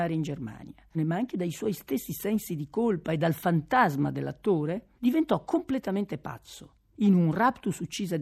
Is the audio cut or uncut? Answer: cut